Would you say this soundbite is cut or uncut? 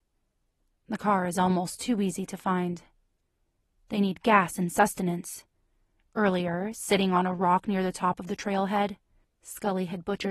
uncut